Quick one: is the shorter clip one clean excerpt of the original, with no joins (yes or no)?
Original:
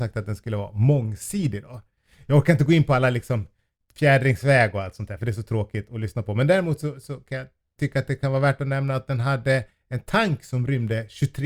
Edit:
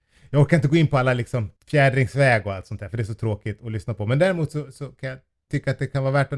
no